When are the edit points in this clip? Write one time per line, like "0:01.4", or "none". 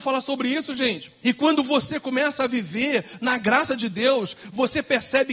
0:01.2